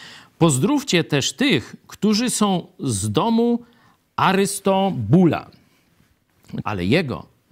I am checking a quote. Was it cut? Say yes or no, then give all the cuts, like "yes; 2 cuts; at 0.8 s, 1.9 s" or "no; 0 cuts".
yes; 1 cut; at 6.6 s